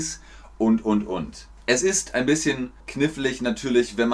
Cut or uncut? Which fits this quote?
cut